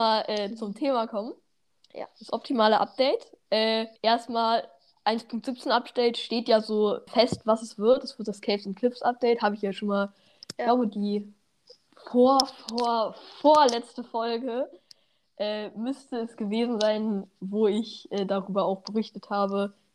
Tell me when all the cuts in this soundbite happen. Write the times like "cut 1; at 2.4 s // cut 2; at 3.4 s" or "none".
cut 1; at 4.0 s // cut 2; at 7.1 s